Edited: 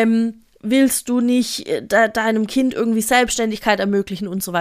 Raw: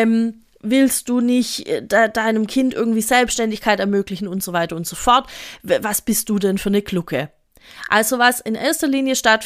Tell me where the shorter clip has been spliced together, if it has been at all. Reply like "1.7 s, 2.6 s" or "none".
none